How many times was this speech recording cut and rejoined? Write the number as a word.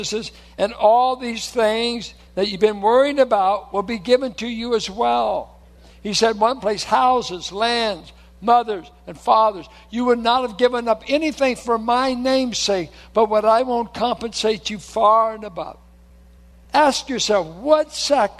zero